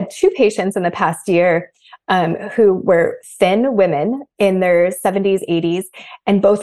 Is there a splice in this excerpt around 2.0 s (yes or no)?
no